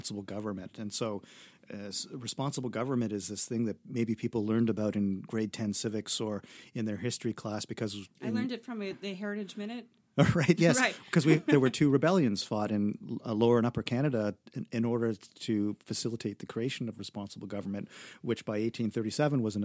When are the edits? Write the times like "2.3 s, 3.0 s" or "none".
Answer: none